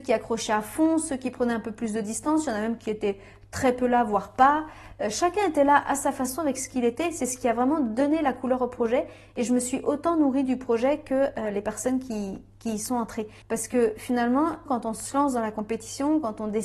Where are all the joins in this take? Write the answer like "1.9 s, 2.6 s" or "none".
13.4 s, 14.7 s